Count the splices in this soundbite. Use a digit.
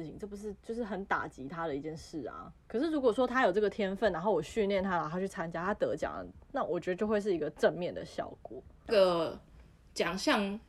1